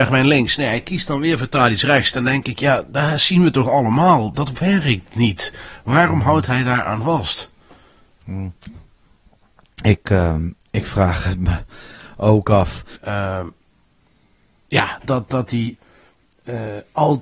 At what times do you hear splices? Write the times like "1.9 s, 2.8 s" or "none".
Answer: 13.0 s, 15.0 s